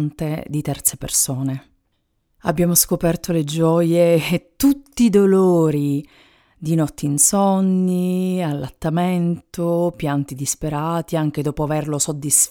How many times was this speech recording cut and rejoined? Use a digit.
0